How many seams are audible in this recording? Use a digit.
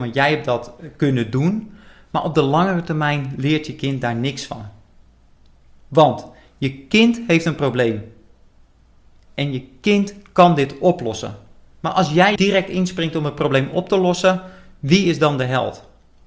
1